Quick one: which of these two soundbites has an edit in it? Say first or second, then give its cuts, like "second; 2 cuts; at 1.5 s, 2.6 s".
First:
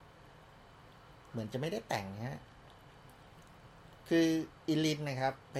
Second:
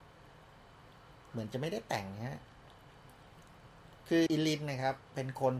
second; 1 cut; at 4.3 s